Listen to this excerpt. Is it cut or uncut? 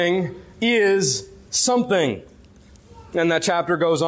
uncut